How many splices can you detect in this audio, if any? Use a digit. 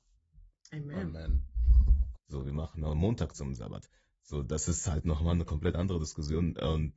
1